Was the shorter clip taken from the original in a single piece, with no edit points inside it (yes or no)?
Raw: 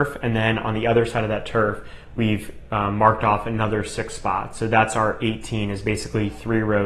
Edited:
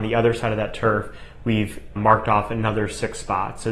no